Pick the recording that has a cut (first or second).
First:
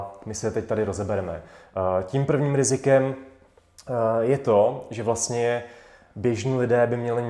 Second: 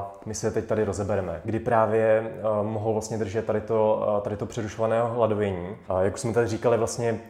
second